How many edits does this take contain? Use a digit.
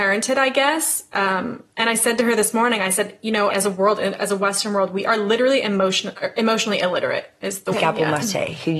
2